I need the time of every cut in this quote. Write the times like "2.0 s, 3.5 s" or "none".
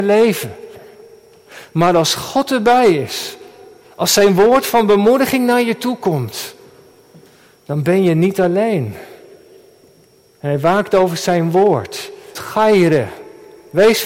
12.4 s